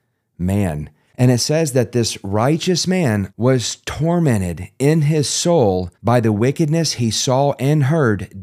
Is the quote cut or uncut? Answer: cut